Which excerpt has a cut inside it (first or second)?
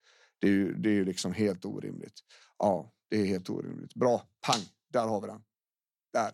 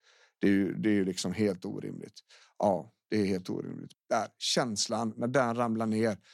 second